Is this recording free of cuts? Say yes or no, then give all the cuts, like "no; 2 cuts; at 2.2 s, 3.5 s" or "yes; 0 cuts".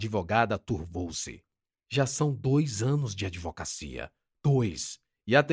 yes; 0 cuts